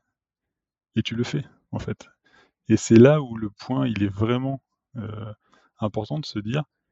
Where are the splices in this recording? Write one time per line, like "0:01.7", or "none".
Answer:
none